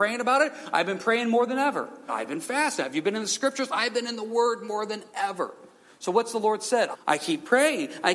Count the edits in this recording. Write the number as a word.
two